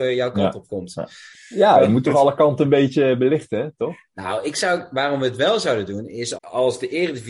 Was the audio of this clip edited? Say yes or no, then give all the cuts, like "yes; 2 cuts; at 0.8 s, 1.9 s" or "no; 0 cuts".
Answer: yes; 2 cuts; at 1.3 s, 6.3 s